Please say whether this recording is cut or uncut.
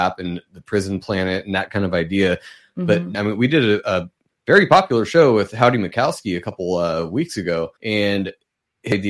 cut